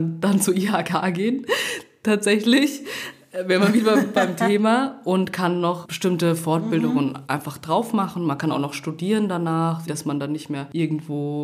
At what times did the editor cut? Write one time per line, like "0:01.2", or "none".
0:07.3
0:09.9